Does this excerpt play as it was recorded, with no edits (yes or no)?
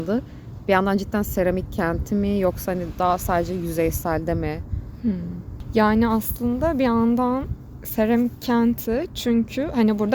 yes